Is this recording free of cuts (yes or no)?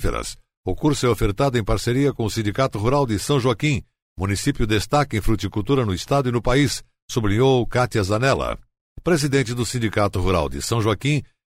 yes